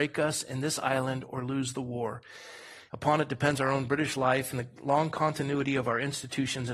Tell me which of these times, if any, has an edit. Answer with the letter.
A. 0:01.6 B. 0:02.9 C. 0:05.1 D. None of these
B